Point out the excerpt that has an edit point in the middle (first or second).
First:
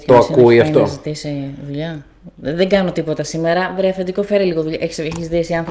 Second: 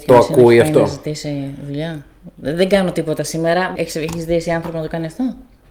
second